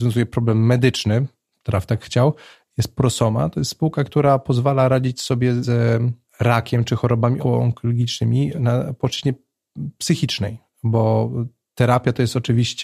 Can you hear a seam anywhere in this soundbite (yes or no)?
no